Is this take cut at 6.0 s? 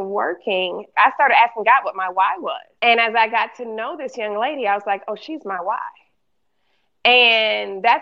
no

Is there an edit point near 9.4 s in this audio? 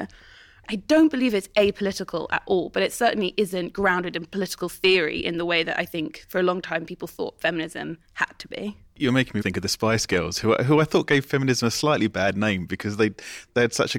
yes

